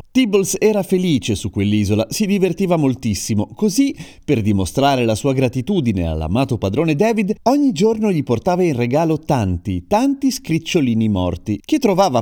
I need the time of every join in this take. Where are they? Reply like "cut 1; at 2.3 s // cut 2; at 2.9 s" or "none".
none